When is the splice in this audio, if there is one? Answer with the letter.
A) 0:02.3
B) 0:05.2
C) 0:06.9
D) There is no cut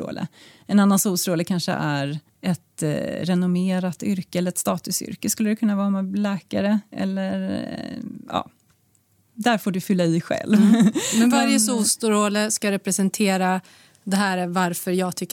A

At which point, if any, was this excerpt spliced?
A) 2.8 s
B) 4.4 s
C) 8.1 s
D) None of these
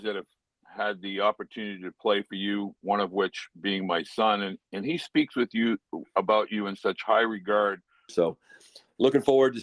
C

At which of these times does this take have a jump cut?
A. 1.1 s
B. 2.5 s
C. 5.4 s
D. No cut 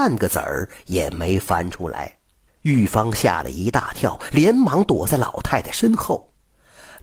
B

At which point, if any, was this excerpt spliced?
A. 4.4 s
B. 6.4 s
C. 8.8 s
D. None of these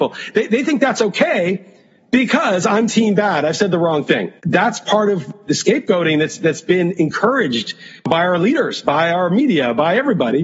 A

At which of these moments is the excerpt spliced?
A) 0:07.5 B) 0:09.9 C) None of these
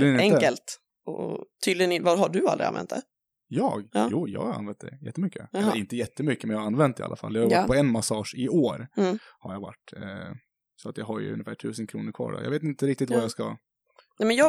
C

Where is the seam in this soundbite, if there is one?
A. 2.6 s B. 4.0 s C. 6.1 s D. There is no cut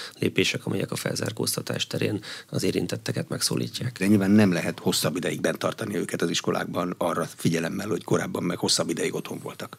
B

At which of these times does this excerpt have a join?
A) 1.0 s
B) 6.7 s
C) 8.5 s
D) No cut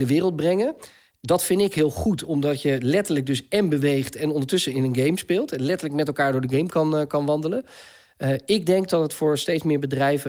D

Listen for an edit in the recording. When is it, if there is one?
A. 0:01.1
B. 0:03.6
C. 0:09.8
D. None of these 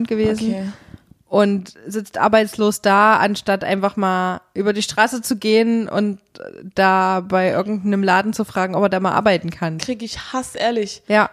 C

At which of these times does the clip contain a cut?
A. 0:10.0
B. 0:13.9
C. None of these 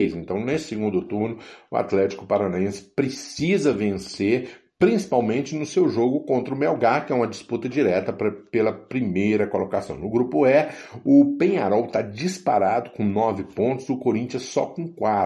C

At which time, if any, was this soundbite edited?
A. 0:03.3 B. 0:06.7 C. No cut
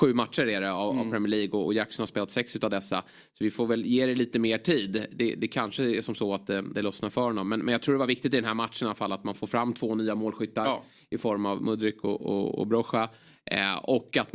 B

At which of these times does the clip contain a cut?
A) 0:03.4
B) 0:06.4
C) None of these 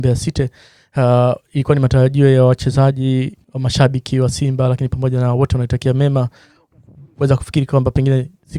A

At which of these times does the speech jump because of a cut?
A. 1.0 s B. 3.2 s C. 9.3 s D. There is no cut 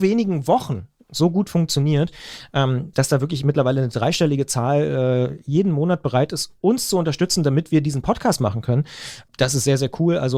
D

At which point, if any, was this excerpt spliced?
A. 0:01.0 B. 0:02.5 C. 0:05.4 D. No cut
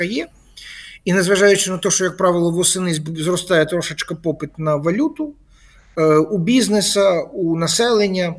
D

